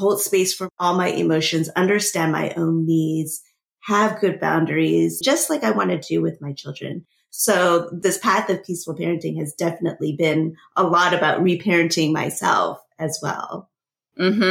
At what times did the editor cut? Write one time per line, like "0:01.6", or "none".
0:05.2